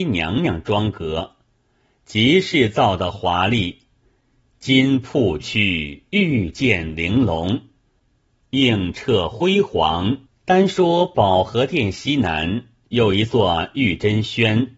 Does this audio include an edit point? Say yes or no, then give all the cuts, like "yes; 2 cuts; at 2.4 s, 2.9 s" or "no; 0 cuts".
yes; 2 cuts; at 5.4 s, 10.3 s